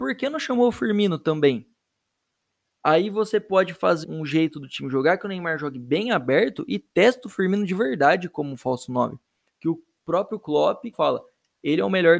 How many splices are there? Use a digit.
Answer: 3